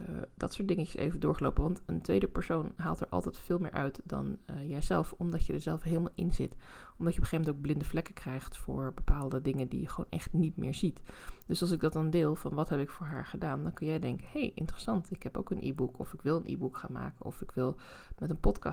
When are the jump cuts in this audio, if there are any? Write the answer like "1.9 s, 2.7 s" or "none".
none